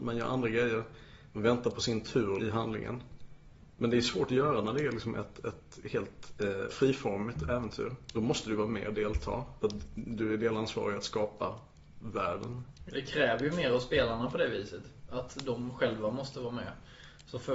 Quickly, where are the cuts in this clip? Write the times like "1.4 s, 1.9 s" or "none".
6.7 s

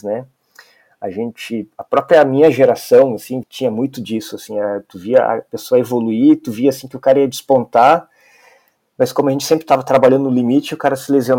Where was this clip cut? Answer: 3.4 s

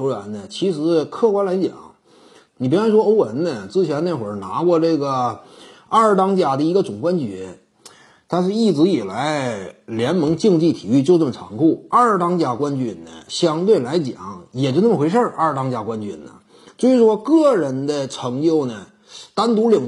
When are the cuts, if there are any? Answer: 2.5 s

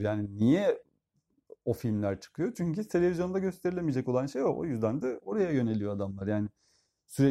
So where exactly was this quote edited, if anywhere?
none

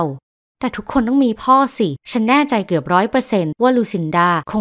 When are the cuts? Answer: 2.0 s

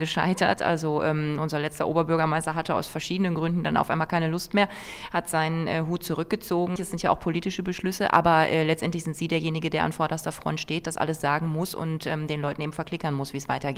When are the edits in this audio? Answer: 6.8 s

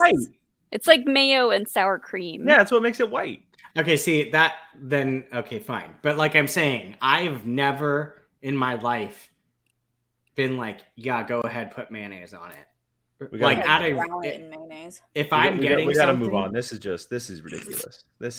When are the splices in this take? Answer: 13.6 s

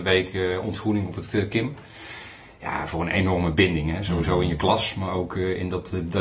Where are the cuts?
none

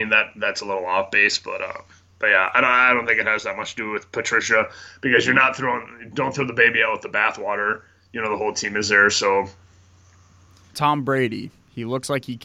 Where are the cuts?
10.7 s

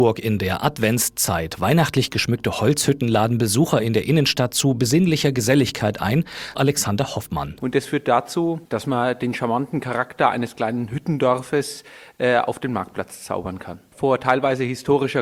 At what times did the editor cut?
6.5 s

